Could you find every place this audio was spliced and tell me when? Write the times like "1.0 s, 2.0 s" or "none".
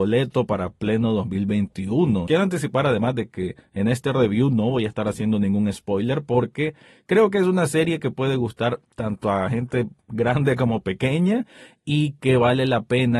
2.3 s